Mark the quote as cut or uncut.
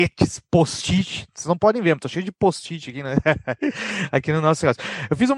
uncut